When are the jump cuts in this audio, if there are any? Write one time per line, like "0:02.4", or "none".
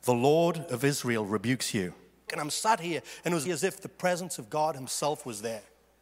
0:02.3
0:03.5